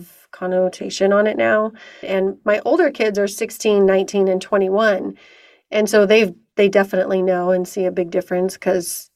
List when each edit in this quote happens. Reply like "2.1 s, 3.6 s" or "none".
2.0 s